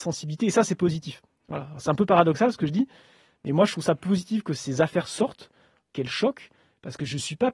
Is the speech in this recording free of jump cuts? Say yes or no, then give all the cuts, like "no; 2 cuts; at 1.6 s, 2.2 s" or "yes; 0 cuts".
no; 1 cut; at 5.9 s